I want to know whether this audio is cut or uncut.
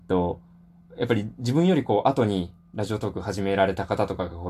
uncut